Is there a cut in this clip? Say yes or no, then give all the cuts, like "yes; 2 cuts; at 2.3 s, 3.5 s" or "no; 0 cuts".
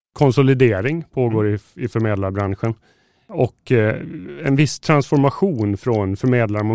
no; 0 cuts